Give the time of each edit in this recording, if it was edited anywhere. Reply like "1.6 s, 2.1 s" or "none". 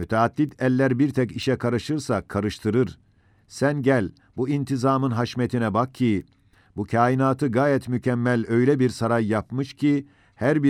none